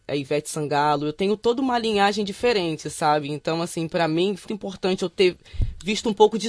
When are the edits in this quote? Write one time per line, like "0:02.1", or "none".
0:04.5